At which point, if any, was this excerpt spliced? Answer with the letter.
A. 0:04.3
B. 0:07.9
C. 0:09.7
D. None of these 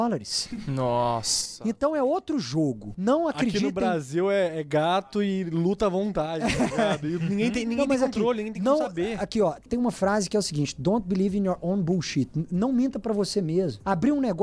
C